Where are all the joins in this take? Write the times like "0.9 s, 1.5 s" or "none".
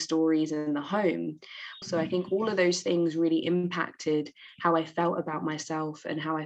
1.8 s

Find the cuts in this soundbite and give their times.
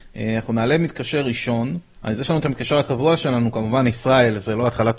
2.0 s

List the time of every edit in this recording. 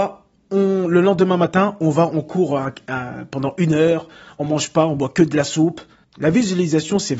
6.0 s

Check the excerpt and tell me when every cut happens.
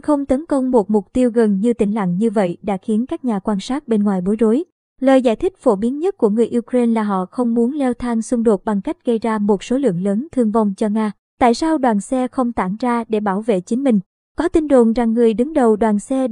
11.3 s

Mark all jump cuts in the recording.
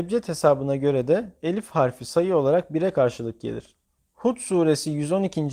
4.0 s

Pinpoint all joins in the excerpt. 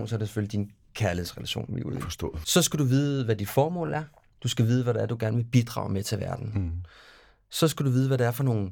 none

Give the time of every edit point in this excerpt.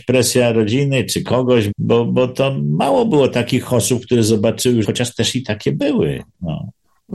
1.7 s, 4.8 s

